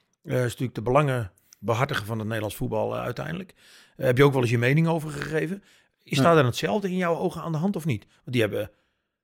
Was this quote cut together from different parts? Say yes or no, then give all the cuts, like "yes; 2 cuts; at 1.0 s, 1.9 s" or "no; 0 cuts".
no; 0 cuts